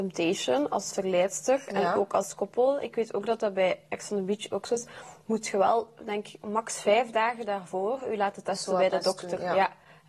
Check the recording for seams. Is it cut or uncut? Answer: uncut